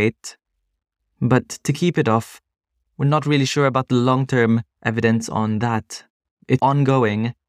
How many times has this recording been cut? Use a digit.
2